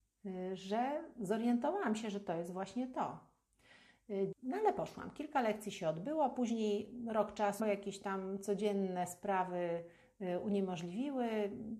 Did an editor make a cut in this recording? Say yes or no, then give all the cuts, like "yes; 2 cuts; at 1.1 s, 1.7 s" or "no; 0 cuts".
yes; 2 cuts; at 4.3 s, 7.6 s